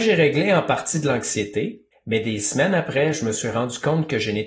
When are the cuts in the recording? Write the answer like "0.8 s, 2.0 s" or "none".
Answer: 1.9 s

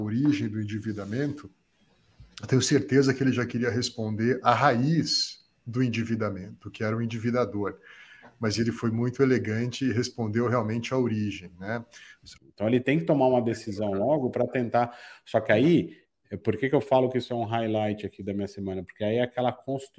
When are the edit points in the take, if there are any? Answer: 12.4 s

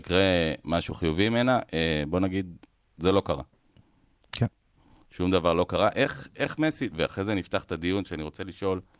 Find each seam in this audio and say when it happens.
3.0 s, 6.9 s

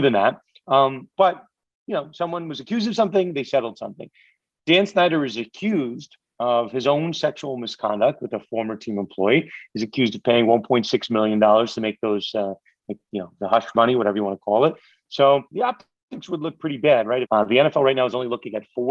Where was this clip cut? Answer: 15.5 s, 17.2 s

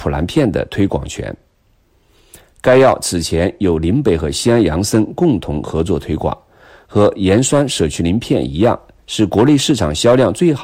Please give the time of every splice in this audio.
none

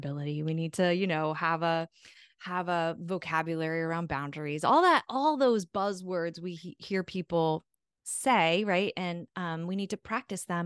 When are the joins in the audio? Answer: none

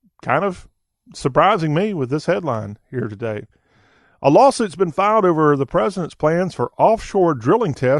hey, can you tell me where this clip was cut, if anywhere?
none

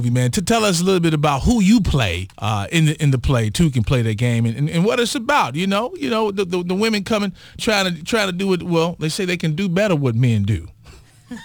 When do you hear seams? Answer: 2.3 s, 7.6 s

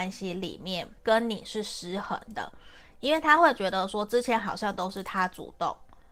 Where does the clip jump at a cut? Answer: 1.0 s

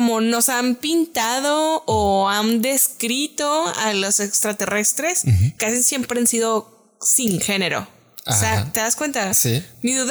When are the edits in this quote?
none

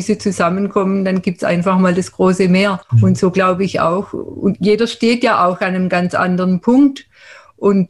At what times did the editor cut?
2.8 s

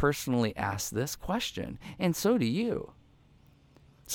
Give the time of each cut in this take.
none

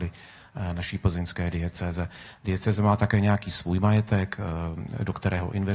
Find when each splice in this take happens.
none

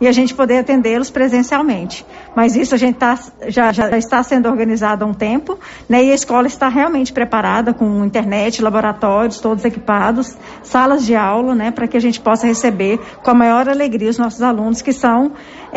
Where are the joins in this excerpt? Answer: none

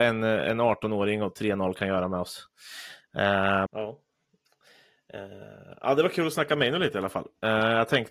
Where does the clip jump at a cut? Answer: 3.7 s

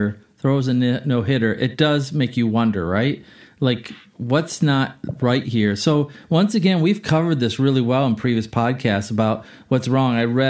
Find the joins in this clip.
none

